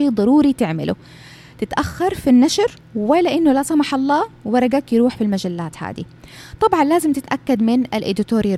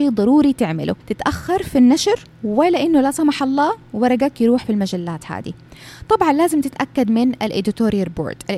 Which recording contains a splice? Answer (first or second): second